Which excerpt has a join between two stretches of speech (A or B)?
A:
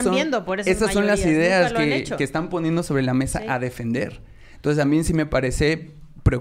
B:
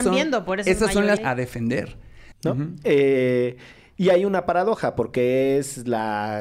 B